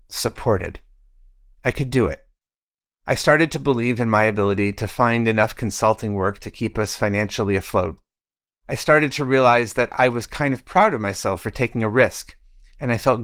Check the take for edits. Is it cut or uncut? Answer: uncut